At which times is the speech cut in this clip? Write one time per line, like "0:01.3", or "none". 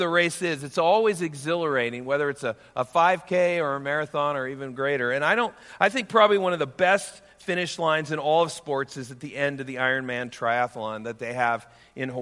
none